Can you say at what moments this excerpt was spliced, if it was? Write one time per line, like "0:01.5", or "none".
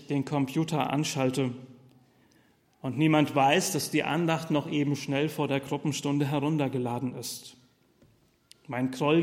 none